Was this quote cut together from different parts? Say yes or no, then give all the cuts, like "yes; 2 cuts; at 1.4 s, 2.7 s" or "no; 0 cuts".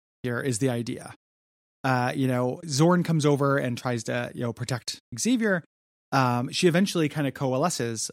yes; 1 cut; at 5.1 s